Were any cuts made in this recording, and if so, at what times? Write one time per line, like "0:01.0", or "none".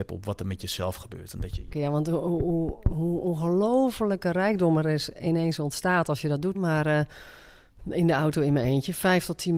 0:01.7
0:06.5